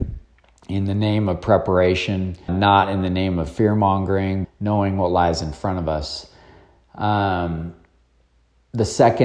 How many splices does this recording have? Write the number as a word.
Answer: two